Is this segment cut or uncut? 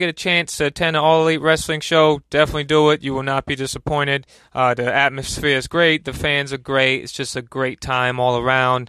uncut